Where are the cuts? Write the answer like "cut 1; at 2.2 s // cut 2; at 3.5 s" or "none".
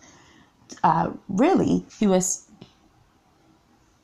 cut 1; at 1.9 s